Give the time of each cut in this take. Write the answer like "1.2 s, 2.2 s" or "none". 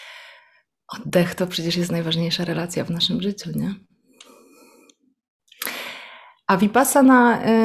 none